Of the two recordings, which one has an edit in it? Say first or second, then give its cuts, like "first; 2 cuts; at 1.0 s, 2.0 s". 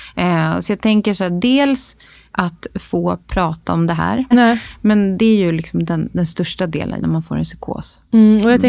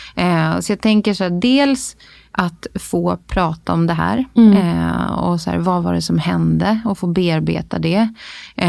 first; 2 cuts; at 4.3 s, 7.0 s